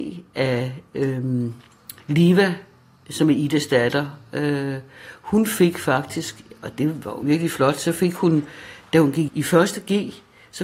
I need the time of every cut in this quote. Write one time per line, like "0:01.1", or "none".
0:02.0
0:07.2
0:09.3